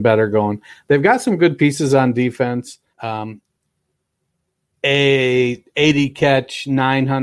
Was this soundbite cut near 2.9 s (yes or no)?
yes